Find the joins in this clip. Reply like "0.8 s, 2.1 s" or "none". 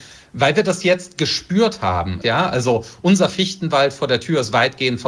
2.2 s